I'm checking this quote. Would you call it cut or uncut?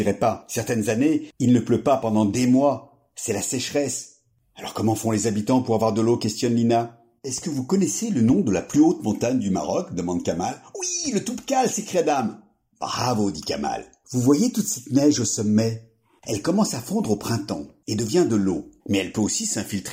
cut